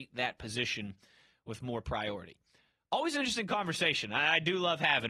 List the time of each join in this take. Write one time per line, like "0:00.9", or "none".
none